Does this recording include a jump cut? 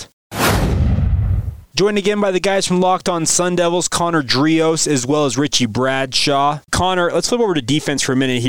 no; 0 cuts

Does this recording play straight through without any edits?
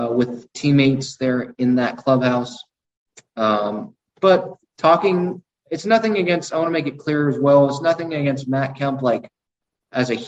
yes; 0 cuts

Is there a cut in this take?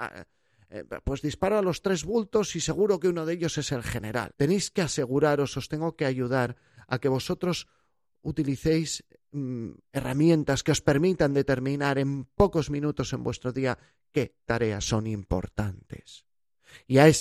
yes; 1 cut; at 4.3 s

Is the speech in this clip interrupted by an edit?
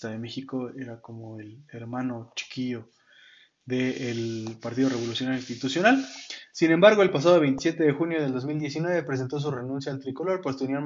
no; 0 cuts

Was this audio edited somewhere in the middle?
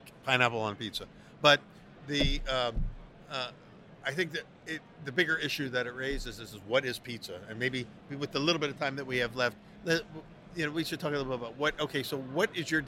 no; 0 cuts

